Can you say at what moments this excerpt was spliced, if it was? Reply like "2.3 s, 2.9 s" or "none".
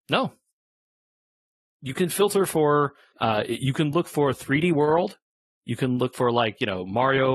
3.1 s